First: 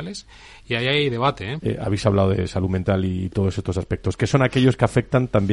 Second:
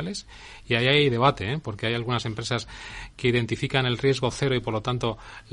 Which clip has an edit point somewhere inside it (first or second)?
first